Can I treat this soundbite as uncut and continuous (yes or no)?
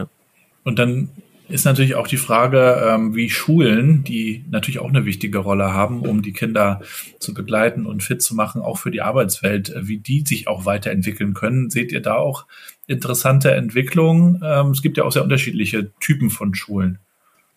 yes